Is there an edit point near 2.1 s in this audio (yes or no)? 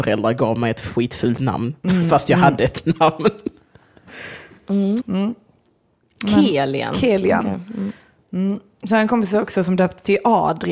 no